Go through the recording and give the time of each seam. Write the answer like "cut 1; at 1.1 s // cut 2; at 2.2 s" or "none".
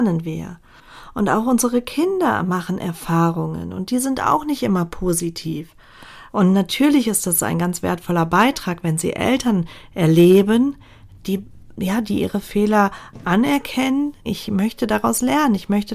cut 1; at 6.3 s // cut 2; at 14.3 s